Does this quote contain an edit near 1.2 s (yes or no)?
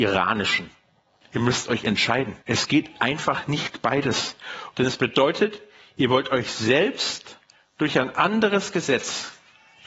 yes